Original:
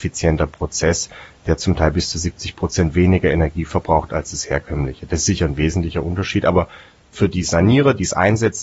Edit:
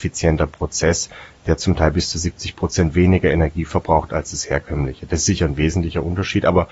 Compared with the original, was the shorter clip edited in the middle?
no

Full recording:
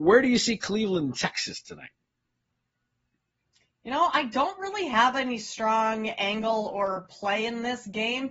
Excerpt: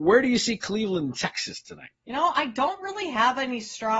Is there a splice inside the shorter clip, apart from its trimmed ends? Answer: yes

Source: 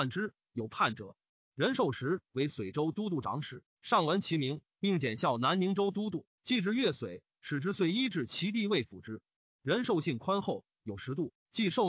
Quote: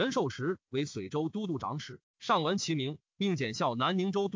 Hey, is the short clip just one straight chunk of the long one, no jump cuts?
yes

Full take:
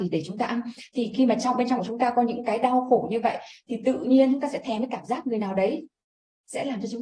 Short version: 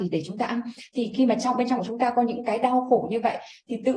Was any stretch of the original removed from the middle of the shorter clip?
no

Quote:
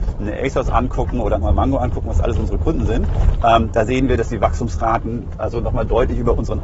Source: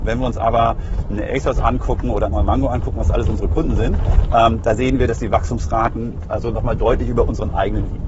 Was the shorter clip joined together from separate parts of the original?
no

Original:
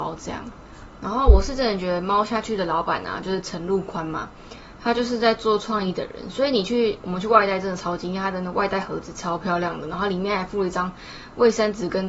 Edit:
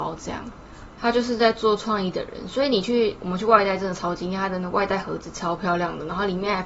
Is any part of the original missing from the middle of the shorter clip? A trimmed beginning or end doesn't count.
yes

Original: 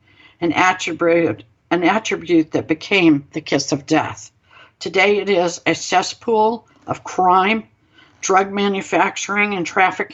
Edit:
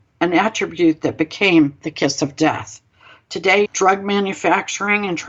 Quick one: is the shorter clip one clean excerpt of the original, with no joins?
no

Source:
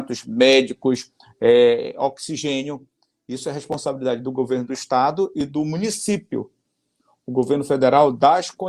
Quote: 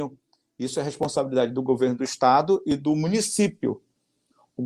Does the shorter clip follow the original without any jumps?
yes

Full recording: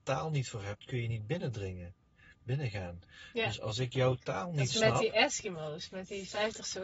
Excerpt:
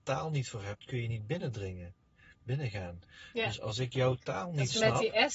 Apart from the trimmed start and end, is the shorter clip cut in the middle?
no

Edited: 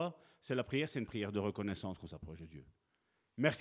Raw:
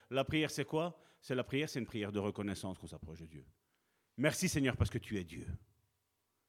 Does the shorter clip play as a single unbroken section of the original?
yes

